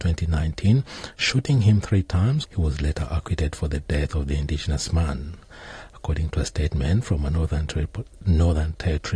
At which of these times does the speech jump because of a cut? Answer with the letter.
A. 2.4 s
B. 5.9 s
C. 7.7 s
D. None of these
A